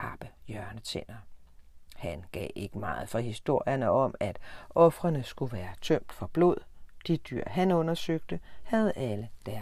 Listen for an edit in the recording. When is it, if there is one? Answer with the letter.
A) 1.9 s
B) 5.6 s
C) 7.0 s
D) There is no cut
D